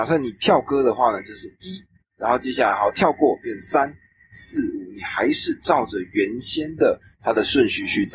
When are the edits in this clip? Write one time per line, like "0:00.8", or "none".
none